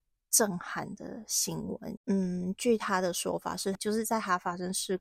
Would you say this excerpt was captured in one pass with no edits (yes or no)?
no